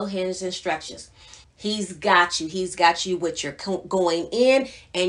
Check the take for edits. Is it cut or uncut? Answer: cut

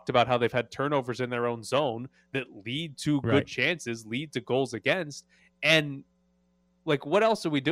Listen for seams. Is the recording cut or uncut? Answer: uncut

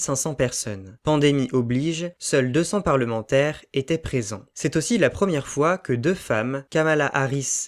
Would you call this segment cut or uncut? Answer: uncut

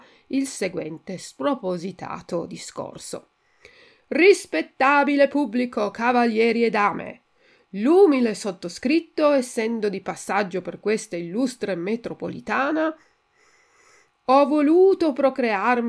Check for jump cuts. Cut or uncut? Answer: uncut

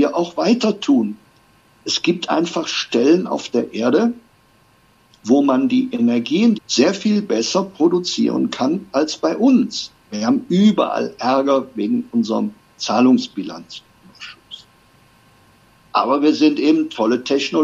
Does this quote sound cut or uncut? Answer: cut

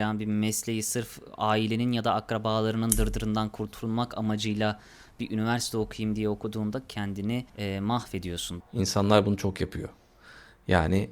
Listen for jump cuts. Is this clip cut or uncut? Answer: cut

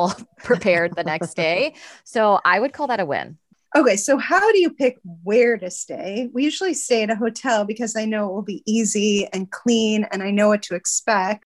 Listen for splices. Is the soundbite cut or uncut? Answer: uncut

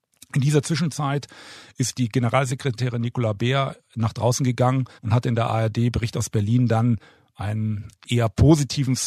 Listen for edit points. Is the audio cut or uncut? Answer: cut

